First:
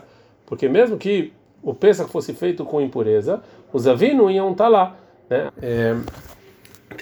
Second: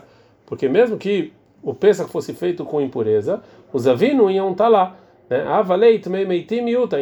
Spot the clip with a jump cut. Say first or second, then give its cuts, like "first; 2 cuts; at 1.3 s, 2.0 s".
first; 1 cut; at 5.5 s